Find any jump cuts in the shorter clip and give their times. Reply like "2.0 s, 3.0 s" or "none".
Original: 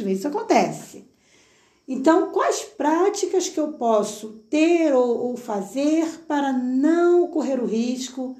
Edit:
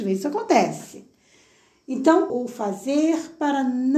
2.3 s